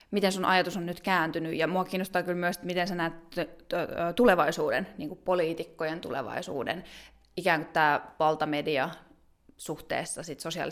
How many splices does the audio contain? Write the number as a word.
zero